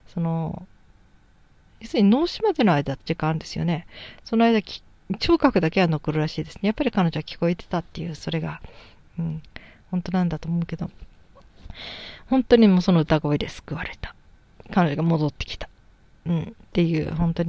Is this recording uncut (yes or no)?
yes